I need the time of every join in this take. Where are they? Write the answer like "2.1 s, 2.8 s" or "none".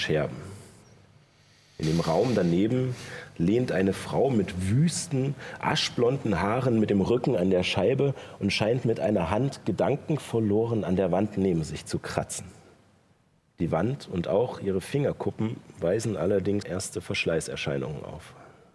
16.6 s